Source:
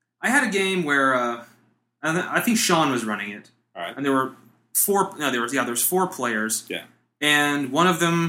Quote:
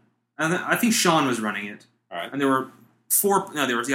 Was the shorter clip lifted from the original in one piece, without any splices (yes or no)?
yes